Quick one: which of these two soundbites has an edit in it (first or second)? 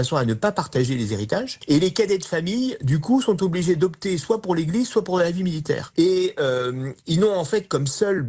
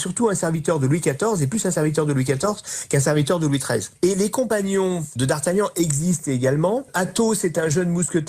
first